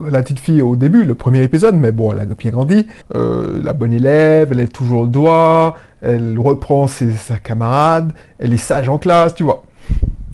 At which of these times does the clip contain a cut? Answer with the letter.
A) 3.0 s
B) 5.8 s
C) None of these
A